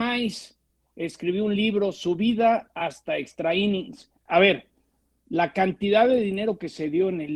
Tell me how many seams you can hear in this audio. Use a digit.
1